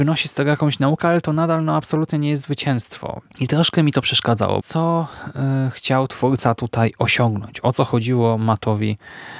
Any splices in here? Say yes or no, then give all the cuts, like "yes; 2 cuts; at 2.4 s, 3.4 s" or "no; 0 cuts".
yes; 2 cuts; at 3.3 s, 4.6 s